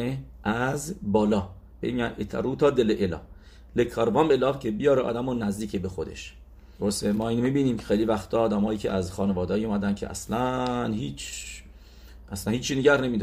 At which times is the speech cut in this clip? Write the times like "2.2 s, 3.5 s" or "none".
6.7 s